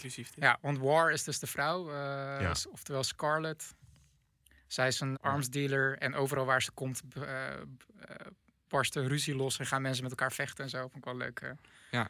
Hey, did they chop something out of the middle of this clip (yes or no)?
yes